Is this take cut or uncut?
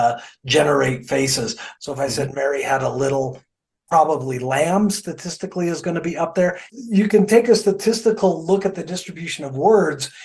cut